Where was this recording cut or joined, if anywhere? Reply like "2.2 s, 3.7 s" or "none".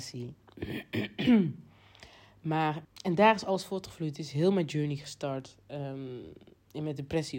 2.8 s